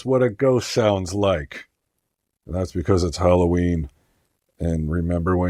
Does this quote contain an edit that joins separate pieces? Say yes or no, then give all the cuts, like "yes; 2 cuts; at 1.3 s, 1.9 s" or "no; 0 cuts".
no; 0 cuts